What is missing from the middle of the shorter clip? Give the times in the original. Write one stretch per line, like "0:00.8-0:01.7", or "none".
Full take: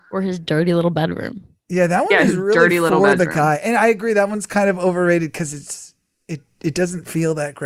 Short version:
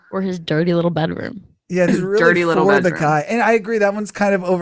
0:01.9-0:02.2